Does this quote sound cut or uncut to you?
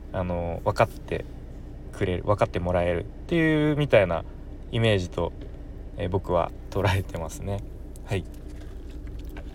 uncut